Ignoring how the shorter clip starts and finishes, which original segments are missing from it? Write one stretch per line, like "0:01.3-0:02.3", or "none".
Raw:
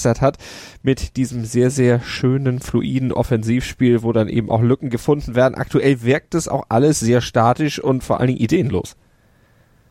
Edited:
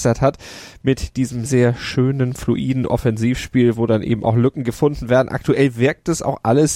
0:01.5-0:01.7